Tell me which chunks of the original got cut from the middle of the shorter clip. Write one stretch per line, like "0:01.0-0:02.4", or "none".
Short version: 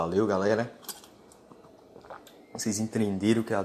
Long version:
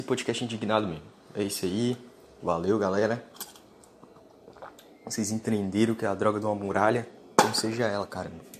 none